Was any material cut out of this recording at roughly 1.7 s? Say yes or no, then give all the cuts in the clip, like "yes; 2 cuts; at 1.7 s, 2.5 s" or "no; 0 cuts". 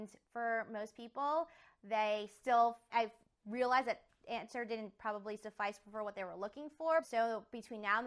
no; 2 cuts; at 2.9 s, 7.0 s